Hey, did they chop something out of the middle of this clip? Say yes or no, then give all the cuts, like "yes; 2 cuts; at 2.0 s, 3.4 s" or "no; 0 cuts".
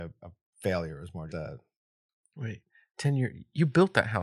yes; 1 cut; at 1.3 s